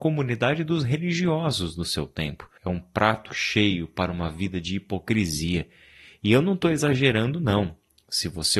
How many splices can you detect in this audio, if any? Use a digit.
1